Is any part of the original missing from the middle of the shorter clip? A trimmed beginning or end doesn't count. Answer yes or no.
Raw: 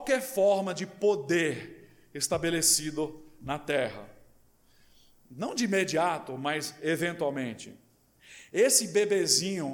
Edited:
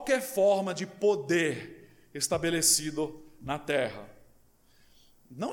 no